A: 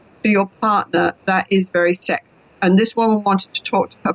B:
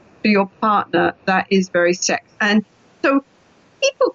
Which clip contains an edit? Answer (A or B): B